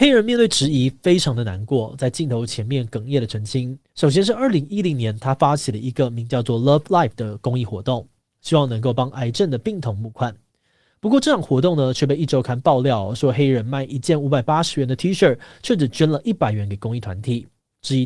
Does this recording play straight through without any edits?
no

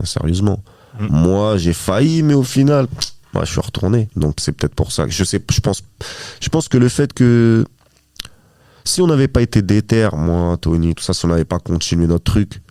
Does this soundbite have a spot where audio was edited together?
yes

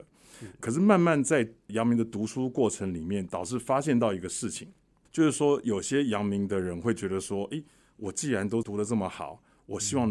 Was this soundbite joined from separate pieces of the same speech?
no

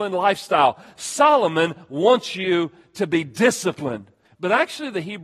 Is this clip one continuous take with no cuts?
no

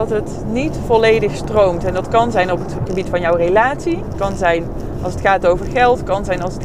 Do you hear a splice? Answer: yes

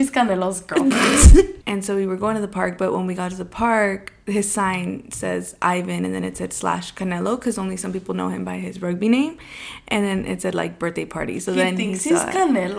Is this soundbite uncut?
no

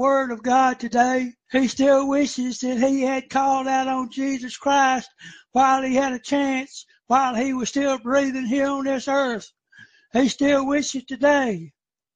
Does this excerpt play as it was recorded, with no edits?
no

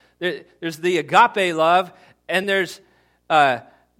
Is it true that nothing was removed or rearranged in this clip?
no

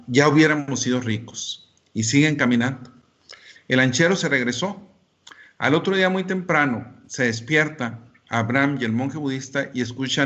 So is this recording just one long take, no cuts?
no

